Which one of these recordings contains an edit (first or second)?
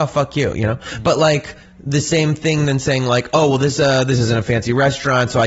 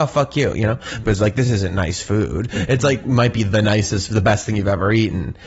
second